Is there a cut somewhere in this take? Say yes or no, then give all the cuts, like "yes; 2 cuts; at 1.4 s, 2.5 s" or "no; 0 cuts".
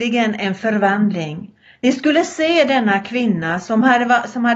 no; 0 cuts